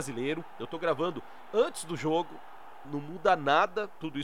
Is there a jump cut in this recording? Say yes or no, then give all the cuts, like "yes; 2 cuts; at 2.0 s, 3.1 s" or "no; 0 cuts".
yes; 1 cut; at 2.8 s